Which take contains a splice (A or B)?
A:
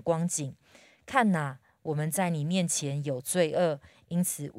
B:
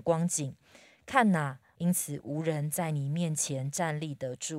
B